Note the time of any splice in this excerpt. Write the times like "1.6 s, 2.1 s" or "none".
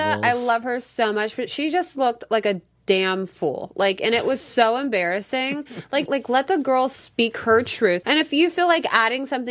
6.1 s, 8.0 s